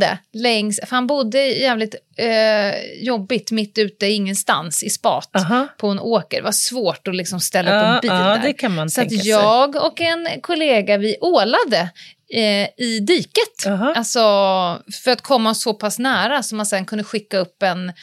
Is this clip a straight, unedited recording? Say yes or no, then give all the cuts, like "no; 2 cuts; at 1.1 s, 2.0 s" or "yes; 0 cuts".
no; 1 cut; at 14.8 s